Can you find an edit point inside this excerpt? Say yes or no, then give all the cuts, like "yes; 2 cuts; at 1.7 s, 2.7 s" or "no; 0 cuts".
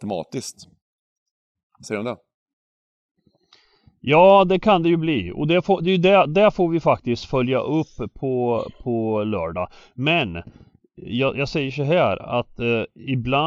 no; 0 cuts